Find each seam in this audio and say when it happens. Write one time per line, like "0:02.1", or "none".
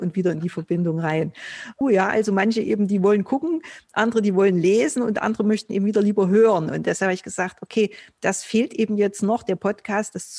0:01.8

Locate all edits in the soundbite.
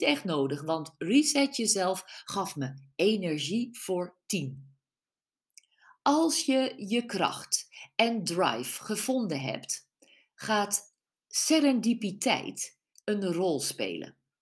0:12.9

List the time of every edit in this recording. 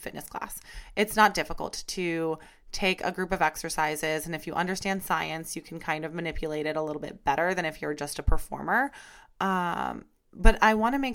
none

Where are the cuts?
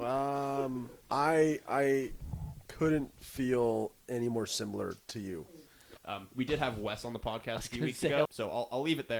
0:01.0
0:06.0
0:08.3

